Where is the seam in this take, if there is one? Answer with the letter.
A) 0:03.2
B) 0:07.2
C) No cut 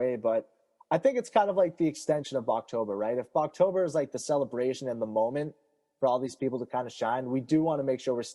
C